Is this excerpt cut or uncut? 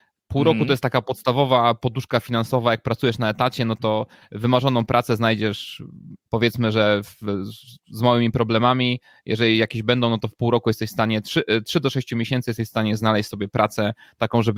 cut